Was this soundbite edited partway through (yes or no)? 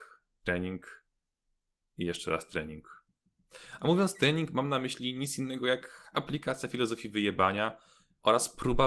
no